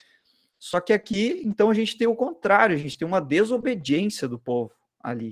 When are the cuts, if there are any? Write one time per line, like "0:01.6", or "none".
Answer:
none